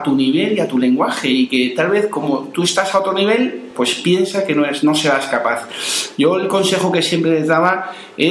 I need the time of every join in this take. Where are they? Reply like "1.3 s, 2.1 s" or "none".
none